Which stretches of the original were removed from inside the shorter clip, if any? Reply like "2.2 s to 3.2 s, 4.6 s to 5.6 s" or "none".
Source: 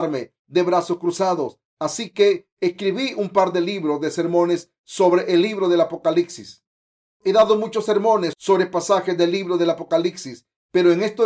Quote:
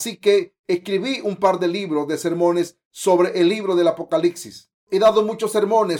6.7 s to 7.1 s